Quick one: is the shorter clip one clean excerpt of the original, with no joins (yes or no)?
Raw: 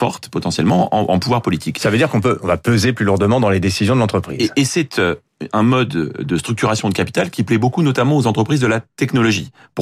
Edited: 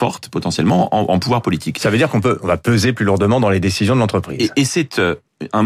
yes